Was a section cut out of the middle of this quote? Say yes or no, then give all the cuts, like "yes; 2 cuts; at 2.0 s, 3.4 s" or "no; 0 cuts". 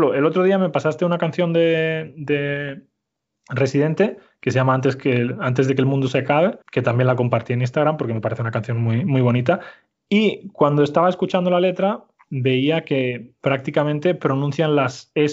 yes; 1 cut; at 6.6 s